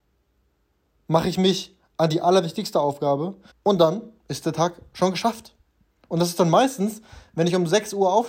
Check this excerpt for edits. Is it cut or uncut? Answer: cut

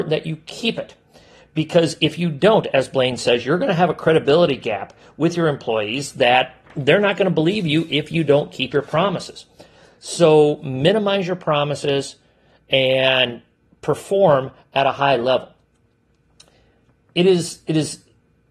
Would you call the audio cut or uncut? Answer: uncut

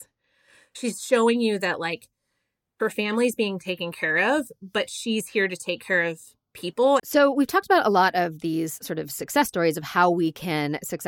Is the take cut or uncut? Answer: cut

